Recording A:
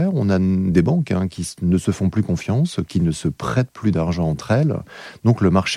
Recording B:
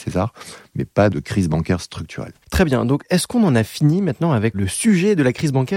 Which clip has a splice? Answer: B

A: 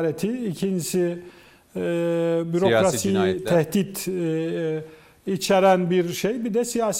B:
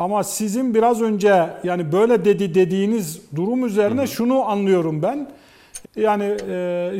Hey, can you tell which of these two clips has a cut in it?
B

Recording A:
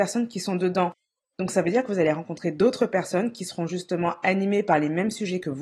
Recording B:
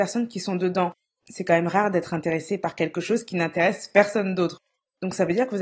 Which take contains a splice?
A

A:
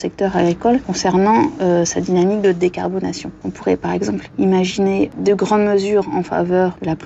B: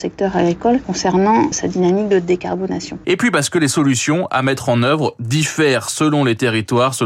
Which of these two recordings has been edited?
B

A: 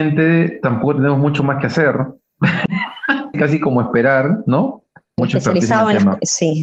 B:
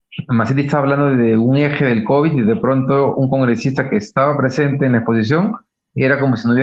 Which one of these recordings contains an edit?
A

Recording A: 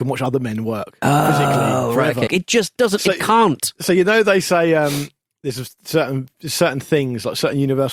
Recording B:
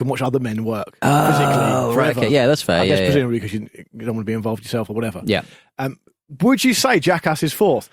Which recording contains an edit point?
A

